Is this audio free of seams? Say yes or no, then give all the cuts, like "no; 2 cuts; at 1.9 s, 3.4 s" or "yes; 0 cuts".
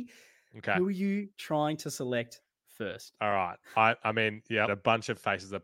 no; 1 cut; at 4.7 s